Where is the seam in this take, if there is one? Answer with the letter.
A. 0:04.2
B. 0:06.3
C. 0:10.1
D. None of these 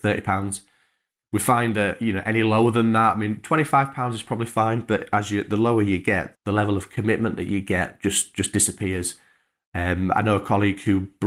B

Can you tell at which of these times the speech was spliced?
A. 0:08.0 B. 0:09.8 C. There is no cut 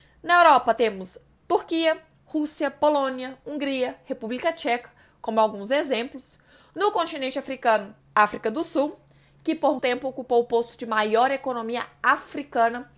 B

